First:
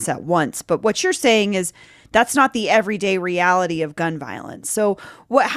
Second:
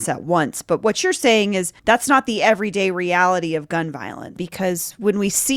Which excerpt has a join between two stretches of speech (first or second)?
second